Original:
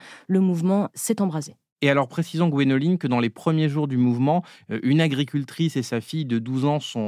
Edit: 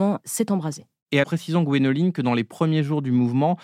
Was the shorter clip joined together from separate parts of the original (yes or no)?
yes